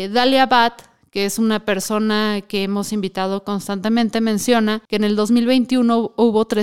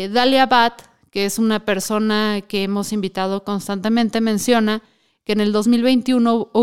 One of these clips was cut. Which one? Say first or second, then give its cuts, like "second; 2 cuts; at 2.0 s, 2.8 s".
first; 1 cut; at 4.9 s